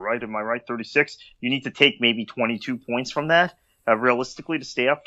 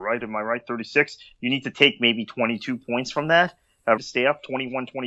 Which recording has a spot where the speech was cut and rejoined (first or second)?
second